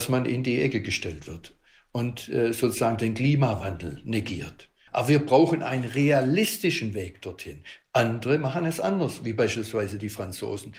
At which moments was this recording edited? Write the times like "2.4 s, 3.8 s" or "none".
4.9 s, 7.8 s